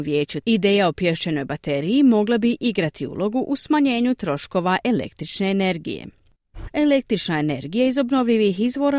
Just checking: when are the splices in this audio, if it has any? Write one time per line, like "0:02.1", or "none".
0:06.7